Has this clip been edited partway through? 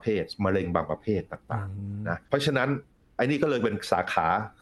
yes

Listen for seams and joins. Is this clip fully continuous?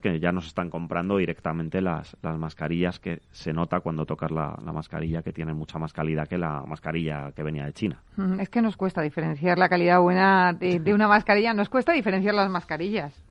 yes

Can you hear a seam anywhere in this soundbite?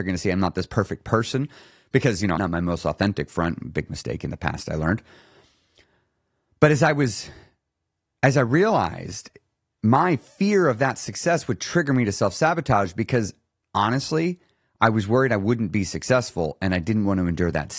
yes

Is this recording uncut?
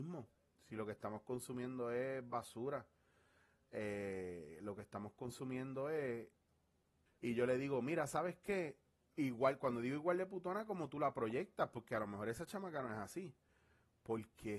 no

